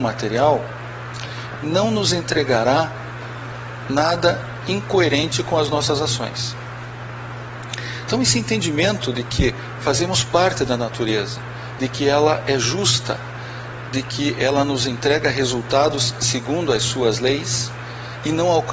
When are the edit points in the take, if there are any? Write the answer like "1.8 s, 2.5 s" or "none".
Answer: 11.8 s

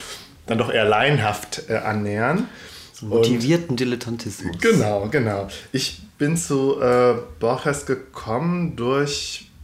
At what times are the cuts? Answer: none

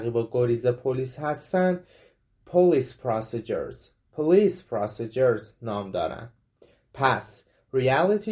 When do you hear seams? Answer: none

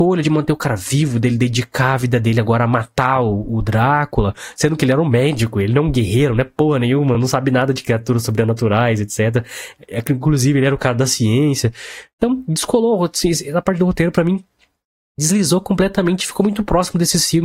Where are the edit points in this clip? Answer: none

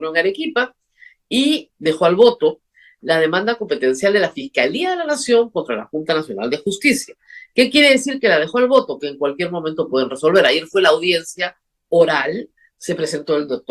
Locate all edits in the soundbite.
1.7 s

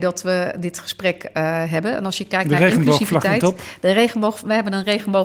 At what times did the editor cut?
none

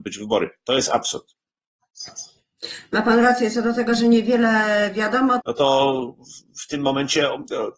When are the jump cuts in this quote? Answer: 5.4 s

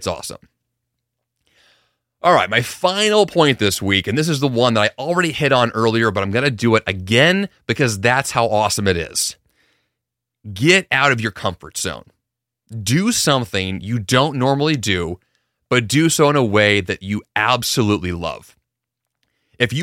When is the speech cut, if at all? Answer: none

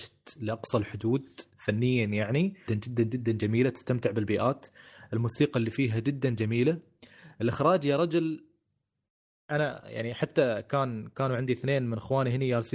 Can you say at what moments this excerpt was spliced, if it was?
2.7 s

